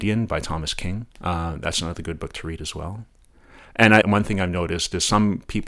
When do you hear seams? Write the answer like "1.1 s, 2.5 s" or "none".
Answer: 1.1 s, 4.0 s